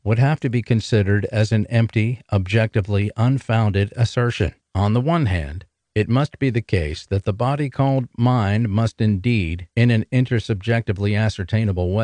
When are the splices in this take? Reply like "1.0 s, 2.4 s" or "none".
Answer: 4.6 s